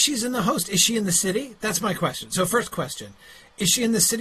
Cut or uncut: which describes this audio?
uncut